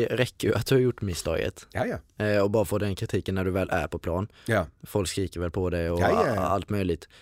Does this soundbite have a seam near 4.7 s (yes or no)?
no